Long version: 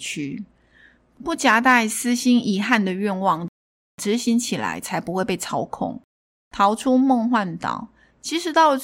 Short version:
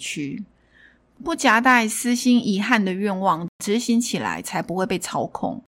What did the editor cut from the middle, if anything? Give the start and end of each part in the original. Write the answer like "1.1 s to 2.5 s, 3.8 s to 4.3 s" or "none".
3.5 s to 3.9 s